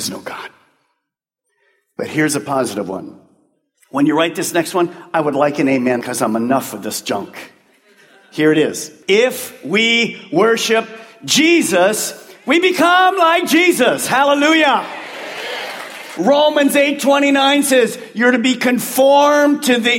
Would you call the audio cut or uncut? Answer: cut